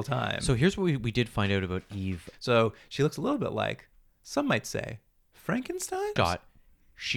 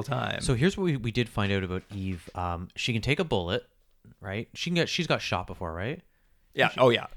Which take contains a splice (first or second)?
first